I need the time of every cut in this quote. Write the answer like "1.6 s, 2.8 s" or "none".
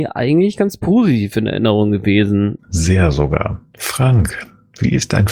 2.6 s